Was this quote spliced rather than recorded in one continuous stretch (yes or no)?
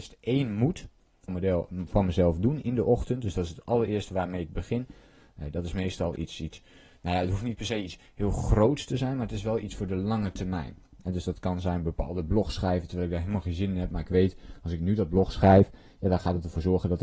yes